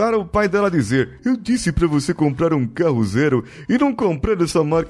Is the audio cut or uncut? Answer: cut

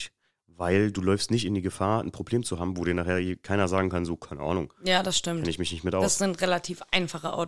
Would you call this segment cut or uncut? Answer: uncut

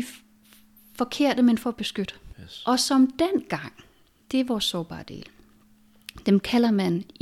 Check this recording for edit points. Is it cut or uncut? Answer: cut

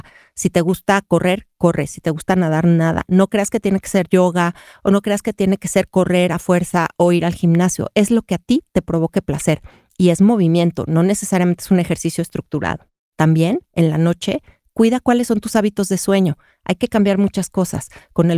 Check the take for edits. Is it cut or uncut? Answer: uncut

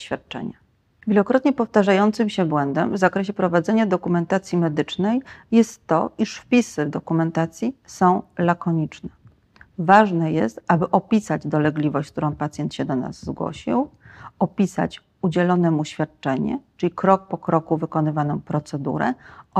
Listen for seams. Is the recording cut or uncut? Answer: uncut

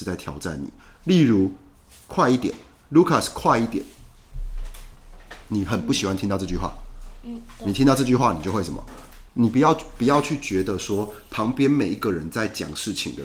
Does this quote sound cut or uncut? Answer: cut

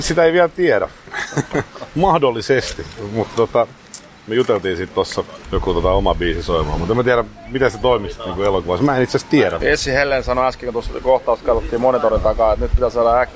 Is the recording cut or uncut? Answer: cut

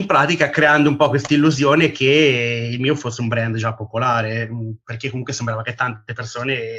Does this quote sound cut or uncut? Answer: uncut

